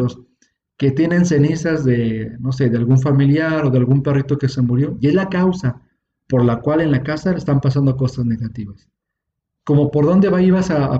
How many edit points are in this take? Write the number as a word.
zero